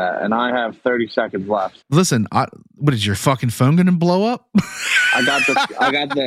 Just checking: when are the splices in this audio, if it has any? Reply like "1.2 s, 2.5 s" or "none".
1.8 s